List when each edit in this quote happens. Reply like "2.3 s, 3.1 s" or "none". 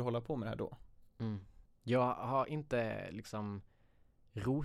1.7 s

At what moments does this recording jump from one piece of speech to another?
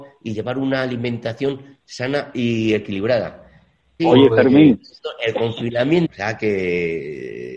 4.0 s, 6.1 s

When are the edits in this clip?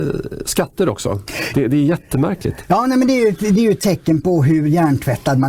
1.5 s

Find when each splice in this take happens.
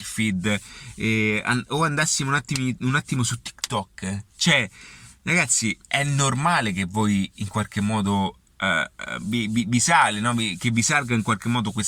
5.8 s, 9.2 s

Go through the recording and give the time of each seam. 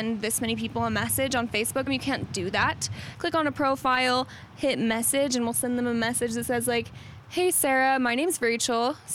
1.9 s, 3.1 s

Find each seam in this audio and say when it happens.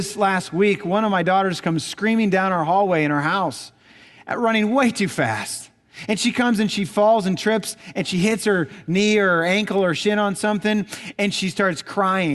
none

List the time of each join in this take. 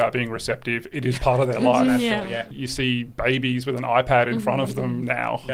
1.2 s

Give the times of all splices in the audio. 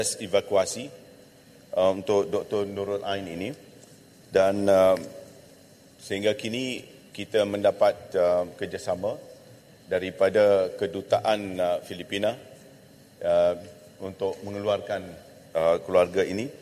none

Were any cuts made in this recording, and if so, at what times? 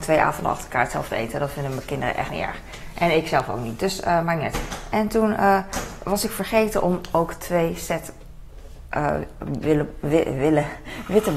none

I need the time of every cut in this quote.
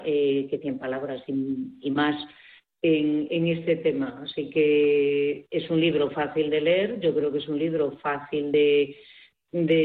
none

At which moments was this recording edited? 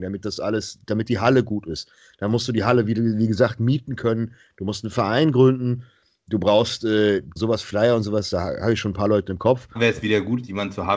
7.4 s, 9.8 s

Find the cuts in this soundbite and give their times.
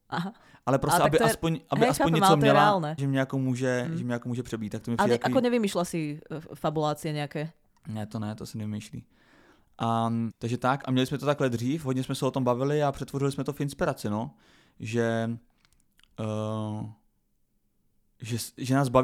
3.0 s, 10.3 s

